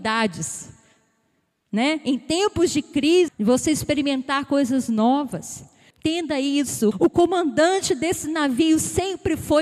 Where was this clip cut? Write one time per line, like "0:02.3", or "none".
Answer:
0:03.3
0:05.9
0:06.9